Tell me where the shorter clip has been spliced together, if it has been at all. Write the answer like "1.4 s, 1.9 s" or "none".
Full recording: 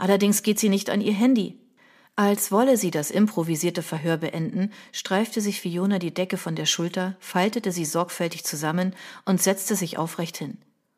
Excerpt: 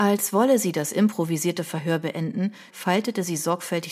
2.7 s